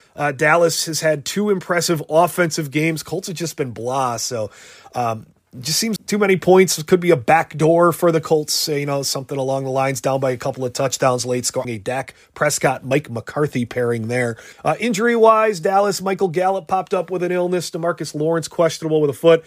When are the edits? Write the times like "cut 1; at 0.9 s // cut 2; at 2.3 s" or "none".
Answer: cut 1; at 6.0 s // cut 2; at 11.6 s // cut 3; at 14.5 s